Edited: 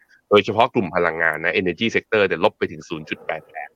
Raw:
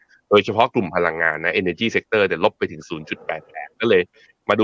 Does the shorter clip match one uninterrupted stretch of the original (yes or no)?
yes